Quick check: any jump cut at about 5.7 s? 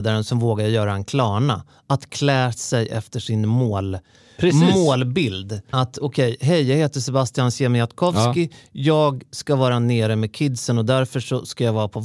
yes; 1 cut; at 5.7 s

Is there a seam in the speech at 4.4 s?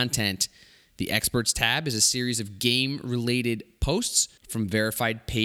yes; 1 cut; at 4.4 s

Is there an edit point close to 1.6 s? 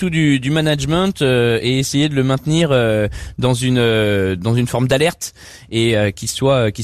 no; 0 cuts

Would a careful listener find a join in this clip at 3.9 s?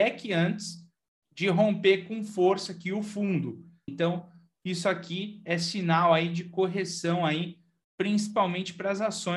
yes; 1 cut; at 3.9 s

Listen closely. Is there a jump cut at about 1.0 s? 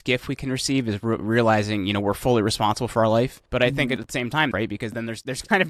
no; 2 cuts; at 3.5 s, 4.5 s

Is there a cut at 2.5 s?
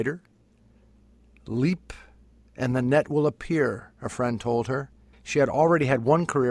no; 1 cut; at 5.1 s

